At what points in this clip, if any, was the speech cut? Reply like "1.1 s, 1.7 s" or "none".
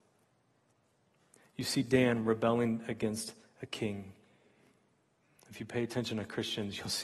none